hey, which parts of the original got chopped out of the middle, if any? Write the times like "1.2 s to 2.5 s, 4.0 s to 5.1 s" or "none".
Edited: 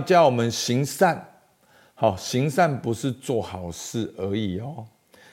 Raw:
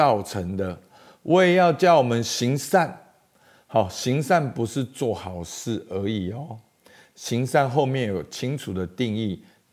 none